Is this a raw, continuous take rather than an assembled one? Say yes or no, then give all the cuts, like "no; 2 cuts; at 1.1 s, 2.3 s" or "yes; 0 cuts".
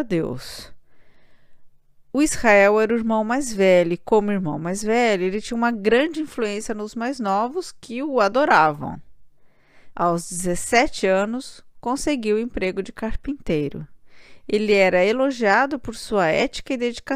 no; 1 cut; at 9.9 s